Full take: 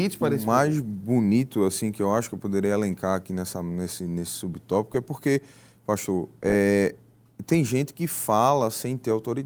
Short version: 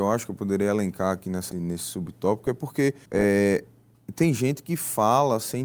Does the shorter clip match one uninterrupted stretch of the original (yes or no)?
no